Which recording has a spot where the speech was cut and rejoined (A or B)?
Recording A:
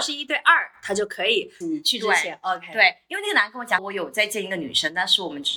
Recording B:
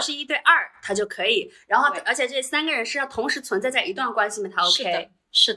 A